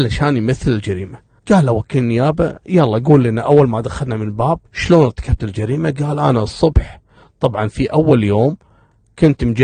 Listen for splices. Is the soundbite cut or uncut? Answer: cut